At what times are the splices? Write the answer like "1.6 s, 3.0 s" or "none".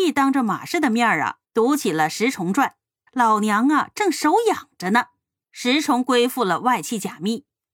3.1 s, 5.4 s

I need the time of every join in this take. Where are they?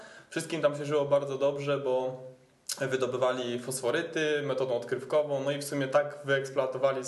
none

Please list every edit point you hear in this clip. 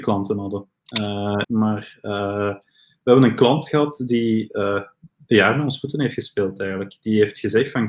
1.4 s

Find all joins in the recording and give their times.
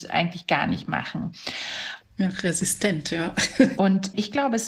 2.0 s, 3.8 s

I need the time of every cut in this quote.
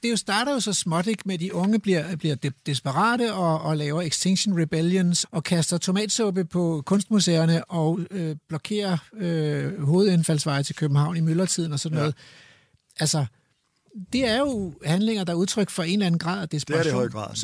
5.2 s

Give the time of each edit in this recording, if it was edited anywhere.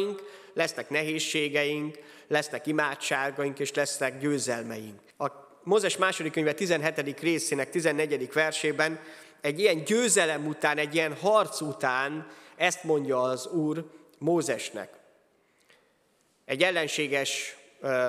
5.1 s

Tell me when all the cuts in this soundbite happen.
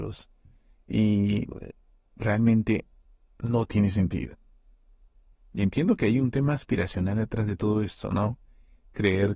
5.5 s

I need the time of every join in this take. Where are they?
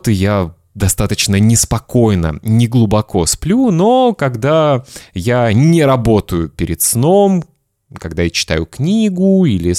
none

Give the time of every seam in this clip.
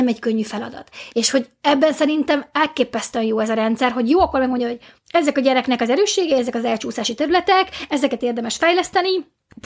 1.1 s

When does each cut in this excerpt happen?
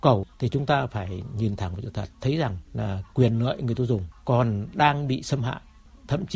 none

